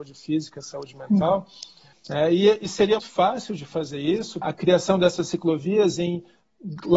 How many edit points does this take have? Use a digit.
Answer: 3